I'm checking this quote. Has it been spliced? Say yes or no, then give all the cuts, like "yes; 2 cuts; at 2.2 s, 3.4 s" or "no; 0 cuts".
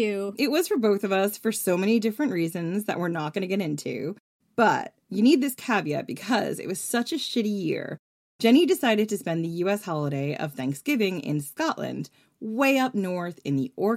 no; 0 cuts